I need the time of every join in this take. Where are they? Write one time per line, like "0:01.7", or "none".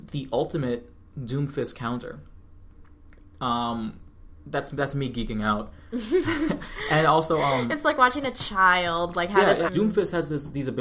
0:09.7